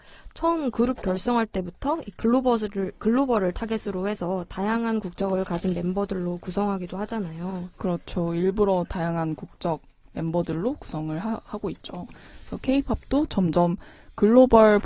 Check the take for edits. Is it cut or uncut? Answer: uncut